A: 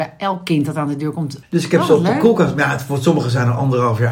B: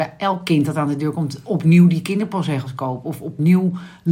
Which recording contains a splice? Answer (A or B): A